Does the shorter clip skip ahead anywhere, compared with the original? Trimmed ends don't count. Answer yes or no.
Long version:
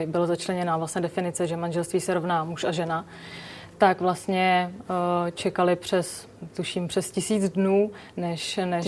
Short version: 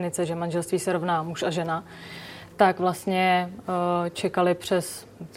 no